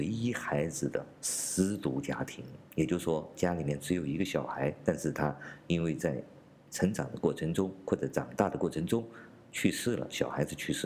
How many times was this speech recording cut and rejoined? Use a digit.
0